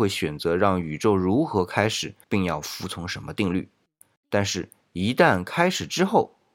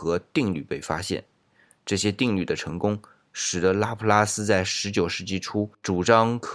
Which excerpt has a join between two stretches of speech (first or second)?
first